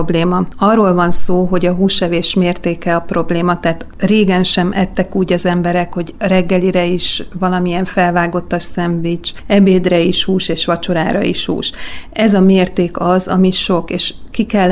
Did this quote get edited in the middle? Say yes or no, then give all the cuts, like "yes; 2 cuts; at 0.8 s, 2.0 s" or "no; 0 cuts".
no; 0 cuts